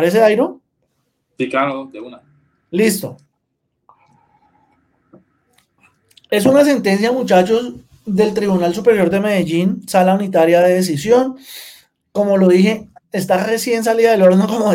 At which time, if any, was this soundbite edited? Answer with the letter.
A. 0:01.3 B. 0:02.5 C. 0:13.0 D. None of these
C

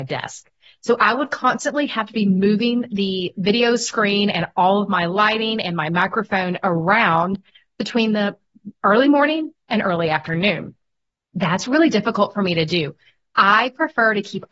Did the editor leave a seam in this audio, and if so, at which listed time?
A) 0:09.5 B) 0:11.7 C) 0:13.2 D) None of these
A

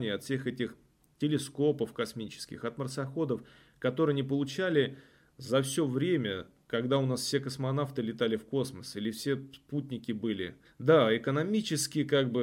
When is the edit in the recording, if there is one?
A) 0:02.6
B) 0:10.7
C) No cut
B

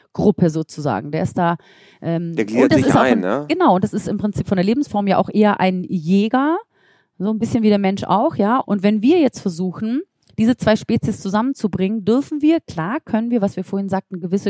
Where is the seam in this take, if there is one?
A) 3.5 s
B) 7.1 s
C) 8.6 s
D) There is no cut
C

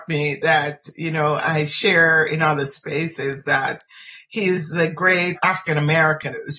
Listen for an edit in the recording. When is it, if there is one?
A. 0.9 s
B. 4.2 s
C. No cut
C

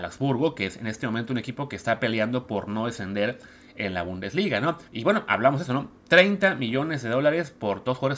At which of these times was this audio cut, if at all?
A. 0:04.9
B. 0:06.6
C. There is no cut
A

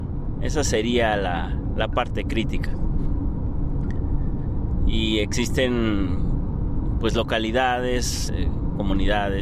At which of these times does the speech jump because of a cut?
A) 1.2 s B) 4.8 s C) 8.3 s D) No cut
C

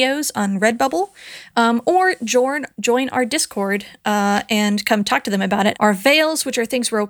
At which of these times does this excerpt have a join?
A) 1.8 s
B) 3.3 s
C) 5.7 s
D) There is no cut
C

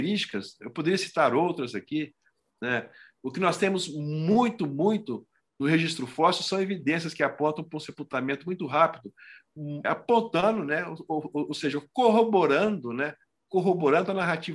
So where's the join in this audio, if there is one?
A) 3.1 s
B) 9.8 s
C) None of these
B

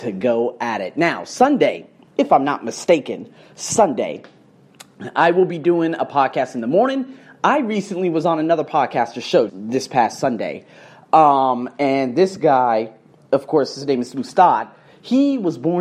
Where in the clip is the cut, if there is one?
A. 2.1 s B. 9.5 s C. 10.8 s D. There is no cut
B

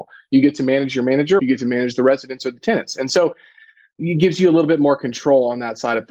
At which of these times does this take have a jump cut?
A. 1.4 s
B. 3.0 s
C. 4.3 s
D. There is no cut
A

